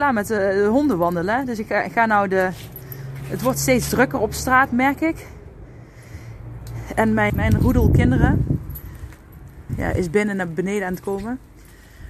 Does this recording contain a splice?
yes; 2 cuts; at 7.3 s, 9.7 s

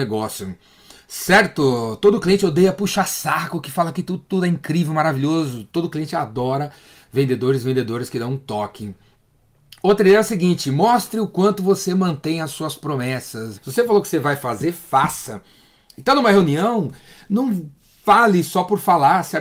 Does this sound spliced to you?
yes; 1 cut; at 13.5 s

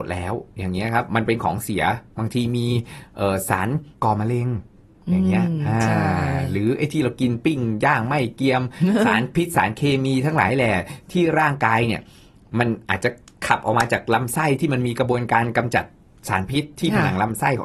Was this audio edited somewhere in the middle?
yes; 1 cut; at 3.9 s

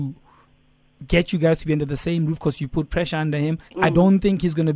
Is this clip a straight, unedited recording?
no; 1 cut; at 3.7 s

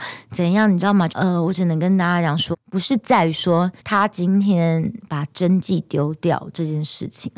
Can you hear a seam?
yes; 3 cuts; at 1.1 s, 2.5 s, 3.8 s

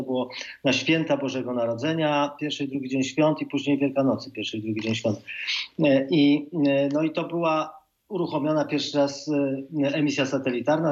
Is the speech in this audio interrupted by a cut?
no; 0 cuts

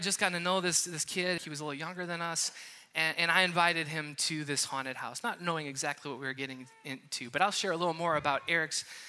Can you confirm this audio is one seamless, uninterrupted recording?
no; 1 cut; at 1.4 s

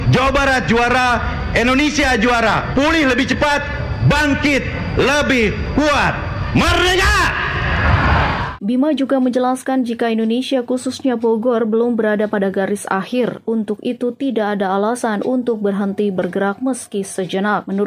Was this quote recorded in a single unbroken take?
yes; 0 cuts

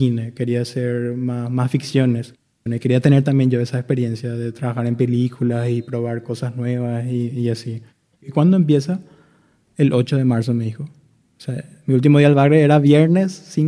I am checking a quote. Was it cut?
yes; 2 cuts; at 2.7 s, 8.1 s

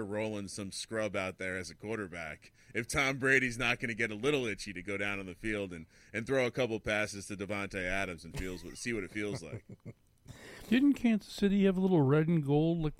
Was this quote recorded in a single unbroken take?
yes; 0 cuts

